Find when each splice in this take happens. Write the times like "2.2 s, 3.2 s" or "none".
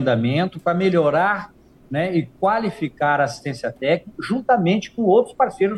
none